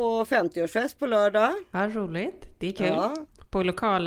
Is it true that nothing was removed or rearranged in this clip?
yes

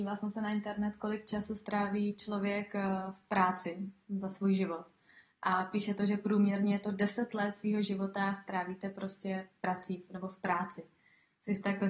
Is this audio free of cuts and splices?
yes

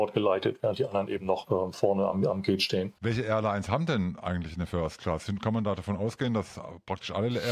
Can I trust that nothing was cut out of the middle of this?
no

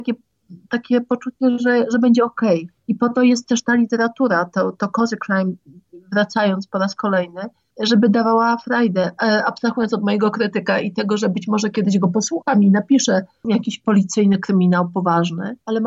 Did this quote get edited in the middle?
yes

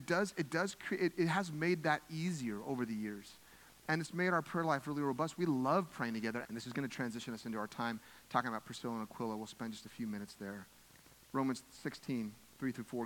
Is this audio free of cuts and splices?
no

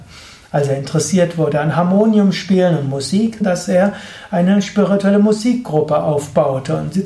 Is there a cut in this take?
yes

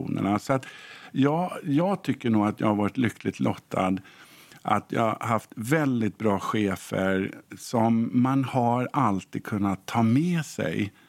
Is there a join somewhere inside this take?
no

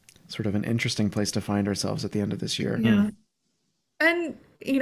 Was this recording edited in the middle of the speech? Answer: no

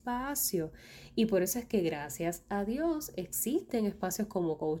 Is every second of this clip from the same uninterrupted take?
yes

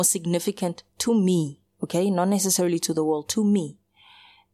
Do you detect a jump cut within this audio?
no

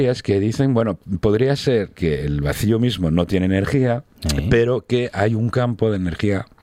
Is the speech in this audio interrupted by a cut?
yes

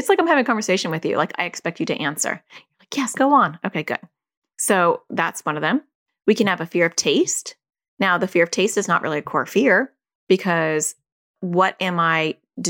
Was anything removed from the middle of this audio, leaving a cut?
yes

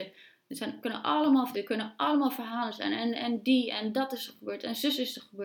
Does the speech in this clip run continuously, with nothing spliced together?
no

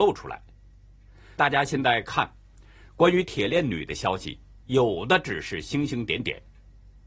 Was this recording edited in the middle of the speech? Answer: yes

